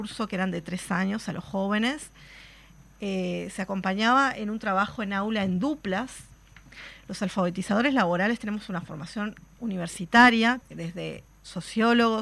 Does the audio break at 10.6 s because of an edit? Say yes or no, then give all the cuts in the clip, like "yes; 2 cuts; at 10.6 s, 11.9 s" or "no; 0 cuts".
yes; 2 cuts; at 9.6 s, 10.6 s